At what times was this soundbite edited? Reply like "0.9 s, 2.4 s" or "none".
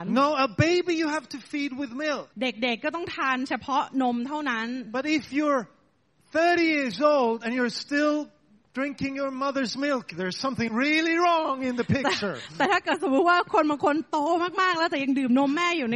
2.3 s